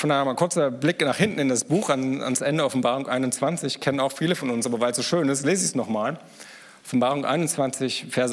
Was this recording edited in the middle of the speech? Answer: no; 0 cuts

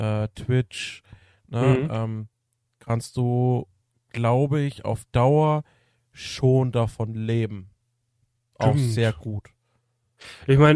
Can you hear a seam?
yes; 1 cut; at 8.5 s

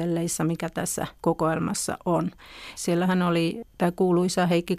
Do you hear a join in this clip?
yes; 2 cuts; at 1.2 s, 2.7 s

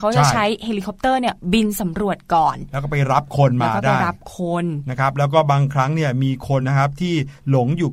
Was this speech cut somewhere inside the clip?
yes; 1 cut; at 6.6 s

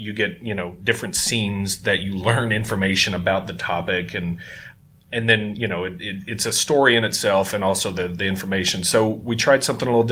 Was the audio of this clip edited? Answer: no; 0 cuts

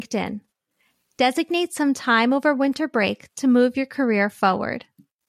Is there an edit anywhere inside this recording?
no; 0 cuts

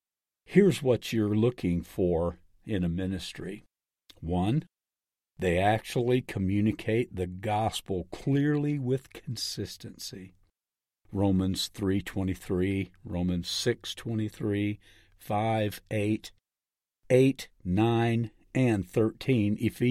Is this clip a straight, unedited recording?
yes; 0 cuts

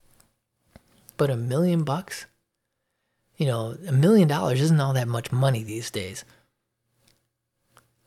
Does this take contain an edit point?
yes; 1 cut; at 1.1 s

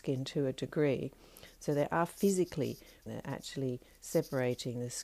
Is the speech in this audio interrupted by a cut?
yes; 1 cut; at 3.1 s

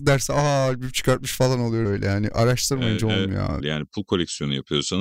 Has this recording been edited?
yes; 2 cuts; at 1.9 s, 3.6 s

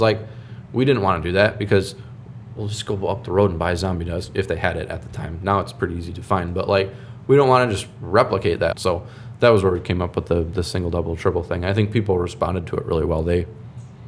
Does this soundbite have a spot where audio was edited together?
yes; 1 cut; at 8.7 s

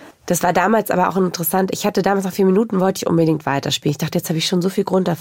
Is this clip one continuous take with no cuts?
yes; 0 cuts

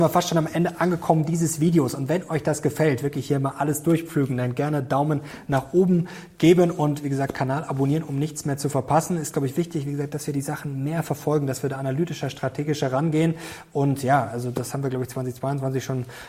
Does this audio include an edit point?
no; 0 cuts

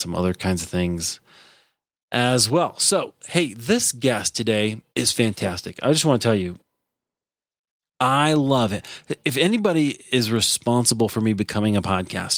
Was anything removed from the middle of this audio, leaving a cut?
yes; 1 cut; at 4.9 s

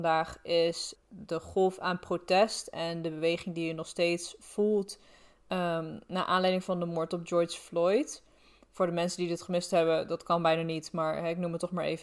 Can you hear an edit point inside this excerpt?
no; 0 cuts

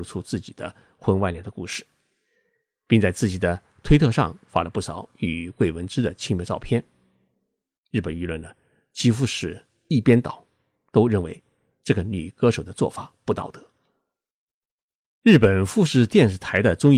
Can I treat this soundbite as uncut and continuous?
yes; 0 cuts

